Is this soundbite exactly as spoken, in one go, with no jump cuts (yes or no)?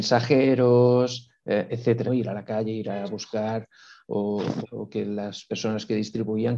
no